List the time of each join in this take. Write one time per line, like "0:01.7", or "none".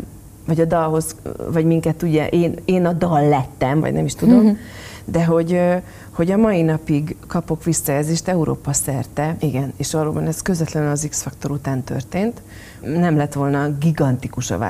0:03.8
0:09.4
0:12.8